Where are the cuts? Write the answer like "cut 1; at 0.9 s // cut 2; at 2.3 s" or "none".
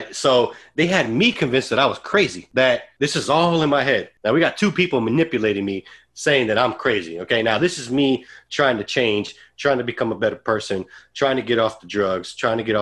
none